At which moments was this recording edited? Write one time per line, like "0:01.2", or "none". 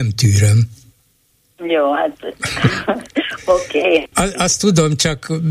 0:04.1

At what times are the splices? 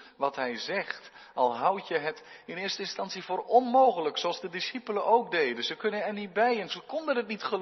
0:06.7

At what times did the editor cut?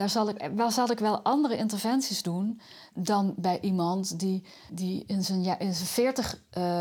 0:02.9
0:04.7

